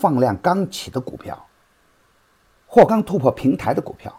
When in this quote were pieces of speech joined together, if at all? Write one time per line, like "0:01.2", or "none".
0:02.9